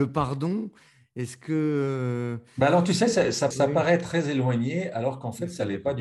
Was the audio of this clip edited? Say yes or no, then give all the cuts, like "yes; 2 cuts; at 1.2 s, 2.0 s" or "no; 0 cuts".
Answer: yes; 1 cut; at 3.5 s